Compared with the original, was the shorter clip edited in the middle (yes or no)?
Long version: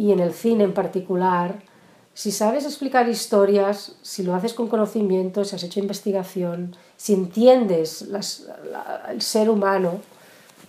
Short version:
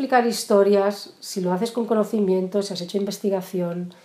no